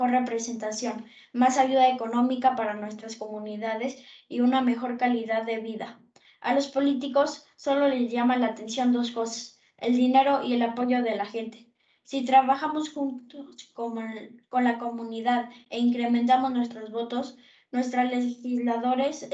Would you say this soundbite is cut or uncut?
uncut